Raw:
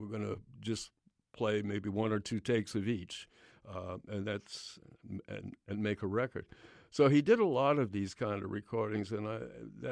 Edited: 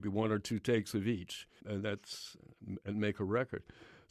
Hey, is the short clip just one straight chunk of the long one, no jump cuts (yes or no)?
no